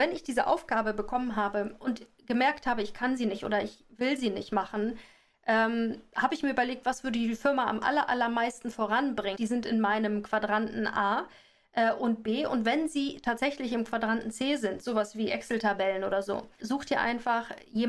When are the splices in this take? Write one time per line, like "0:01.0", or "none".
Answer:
0:09.3
0:16.6